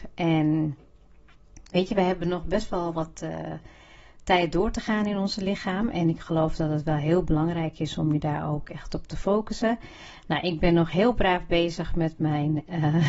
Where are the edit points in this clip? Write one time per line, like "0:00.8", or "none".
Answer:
none